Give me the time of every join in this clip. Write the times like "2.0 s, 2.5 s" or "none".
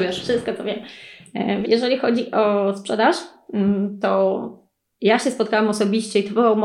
1.6 s